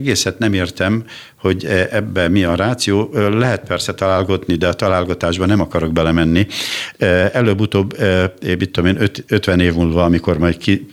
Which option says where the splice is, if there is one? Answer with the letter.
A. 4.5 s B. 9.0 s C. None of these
A